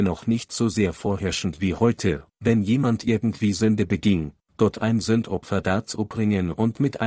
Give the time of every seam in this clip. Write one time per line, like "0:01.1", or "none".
0:02.3
0:04.5